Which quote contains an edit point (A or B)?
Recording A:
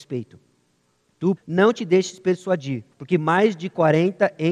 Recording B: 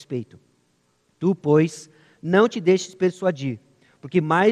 A